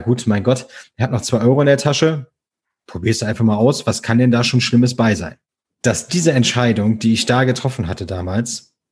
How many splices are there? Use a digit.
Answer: 0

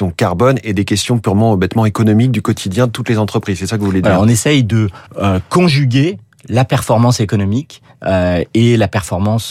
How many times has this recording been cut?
2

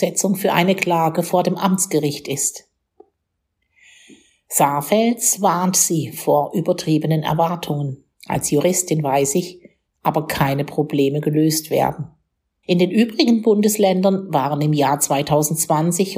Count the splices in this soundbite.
3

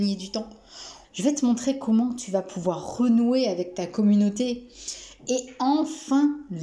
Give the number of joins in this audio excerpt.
1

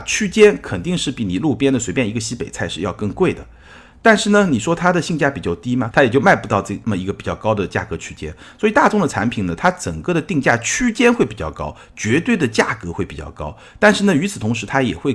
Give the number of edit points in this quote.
1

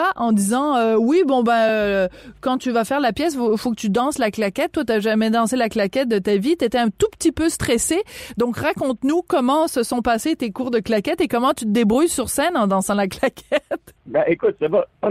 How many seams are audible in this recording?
0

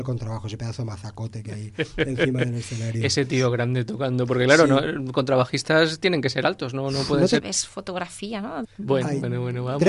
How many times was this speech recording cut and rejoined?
2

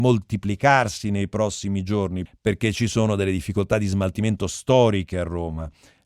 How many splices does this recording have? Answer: 1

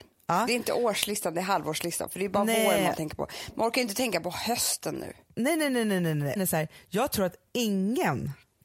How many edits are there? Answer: 1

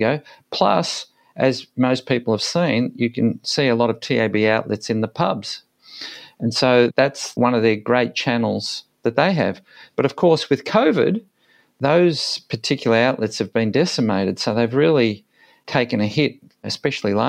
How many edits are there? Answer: 0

